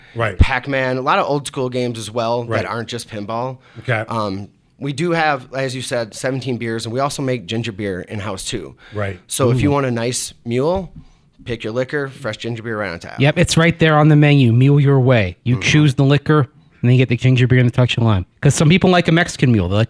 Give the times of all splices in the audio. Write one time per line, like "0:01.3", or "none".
0:18.3